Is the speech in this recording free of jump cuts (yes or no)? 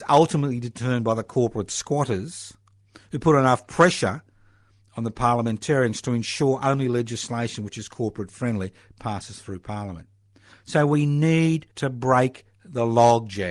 no